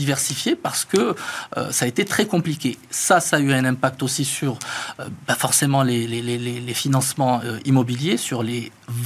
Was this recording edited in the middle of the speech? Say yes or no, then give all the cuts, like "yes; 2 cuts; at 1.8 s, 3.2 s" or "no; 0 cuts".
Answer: no; 0 cuts